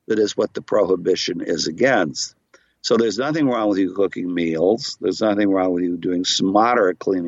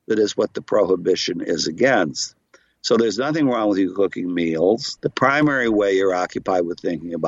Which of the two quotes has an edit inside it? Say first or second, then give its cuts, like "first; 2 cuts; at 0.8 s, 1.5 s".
second; 1 cut; at 5.0 s